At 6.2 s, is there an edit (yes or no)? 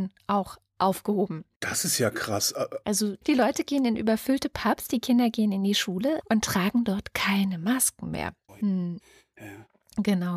yes